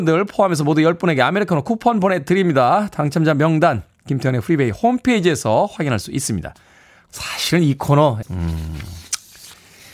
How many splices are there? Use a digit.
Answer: 2